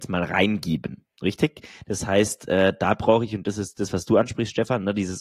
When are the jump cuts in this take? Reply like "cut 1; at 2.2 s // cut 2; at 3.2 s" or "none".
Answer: none